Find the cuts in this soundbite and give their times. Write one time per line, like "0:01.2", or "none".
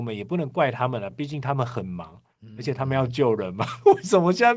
none